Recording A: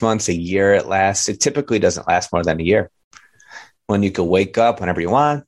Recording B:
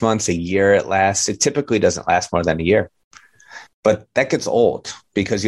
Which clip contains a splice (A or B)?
B